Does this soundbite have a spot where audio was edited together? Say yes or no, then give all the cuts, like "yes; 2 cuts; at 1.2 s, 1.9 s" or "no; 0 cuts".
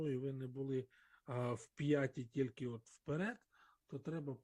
no; 0 cuts